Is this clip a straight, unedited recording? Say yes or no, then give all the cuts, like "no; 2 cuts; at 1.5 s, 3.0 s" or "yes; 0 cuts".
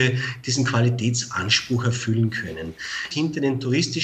no; 1 cut; at 3.1 s